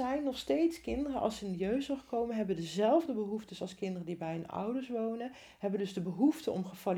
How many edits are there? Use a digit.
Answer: 0